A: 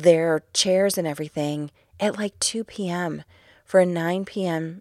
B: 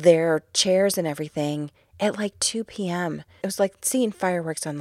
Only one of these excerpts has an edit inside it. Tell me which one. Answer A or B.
B